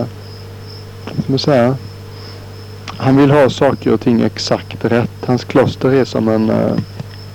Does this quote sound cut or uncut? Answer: uncut